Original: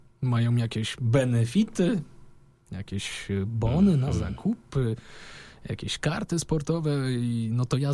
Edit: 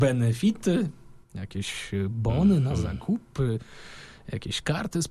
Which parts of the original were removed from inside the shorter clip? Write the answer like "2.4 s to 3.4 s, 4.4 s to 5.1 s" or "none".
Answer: 2.4 s to 2.6 s

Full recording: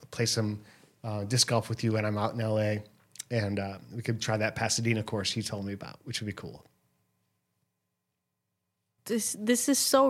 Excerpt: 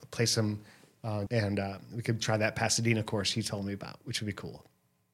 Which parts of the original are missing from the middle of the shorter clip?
1.3 s to 3.3 s

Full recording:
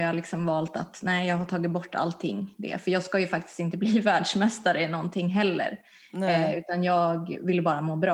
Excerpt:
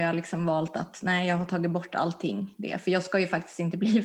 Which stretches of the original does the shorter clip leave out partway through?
none

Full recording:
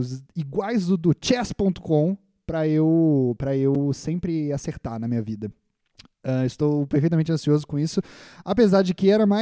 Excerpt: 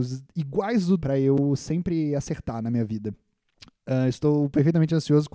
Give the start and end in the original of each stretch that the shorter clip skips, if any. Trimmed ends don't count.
1.0 s to 3.4 s

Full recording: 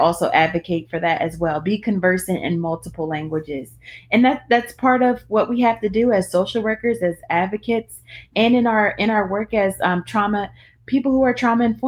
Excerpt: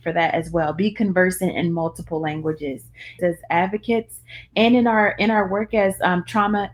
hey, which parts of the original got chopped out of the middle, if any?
4.1 s to 7.0 s

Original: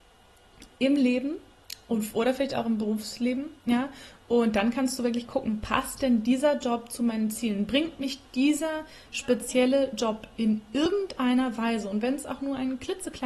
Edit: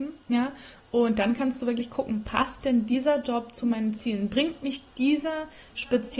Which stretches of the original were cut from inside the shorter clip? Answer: none

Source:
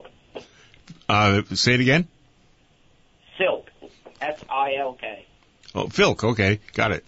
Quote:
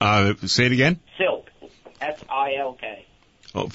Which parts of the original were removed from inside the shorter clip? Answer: 2.2 s to 3.3 s

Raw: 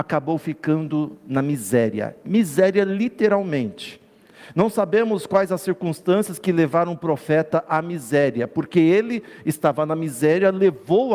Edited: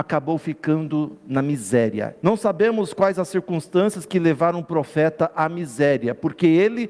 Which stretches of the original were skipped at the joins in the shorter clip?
2.2 s to 4.5 s

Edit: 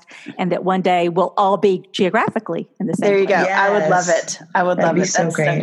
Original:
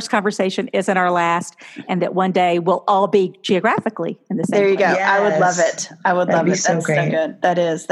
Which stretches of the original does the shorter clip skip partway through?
none

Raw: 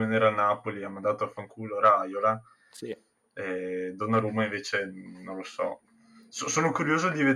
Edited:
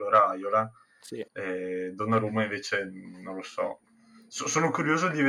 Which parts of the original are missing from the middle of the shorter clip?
3.0 s to 3.3 s

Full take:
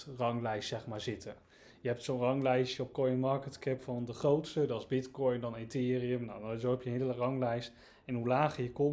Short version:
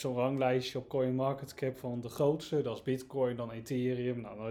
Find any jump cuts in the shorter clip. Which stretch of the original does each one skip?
none

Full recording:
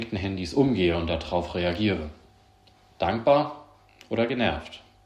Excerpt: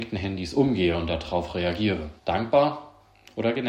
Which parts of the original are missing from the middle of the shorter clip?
2.2 s to 2.9 s

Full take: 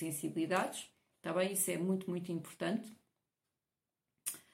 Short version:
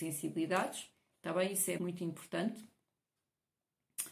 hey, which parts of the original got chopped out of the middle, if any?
1.8 s to 2.1 s

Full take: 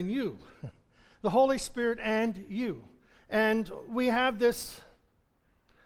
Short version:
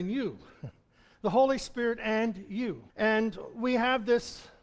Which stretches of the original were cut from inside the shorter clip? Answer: 2.9 s to 3.2 s

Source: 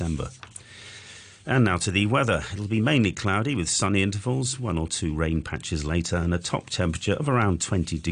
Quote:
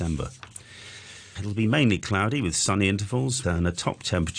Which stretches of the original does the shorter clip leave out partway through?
1.3 s to 2.5 s, 4.6 s to 6.1 s

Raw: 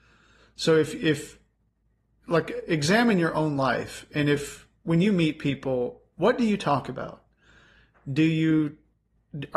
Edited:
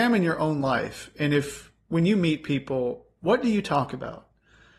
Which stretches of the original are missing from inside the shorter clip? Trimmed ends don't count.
none

